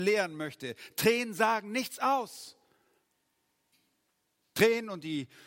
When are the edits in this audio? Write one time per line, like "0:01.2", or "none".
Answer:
none